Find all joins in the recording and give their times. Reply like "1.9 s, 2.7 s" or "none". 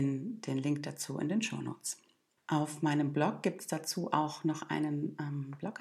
2.4 s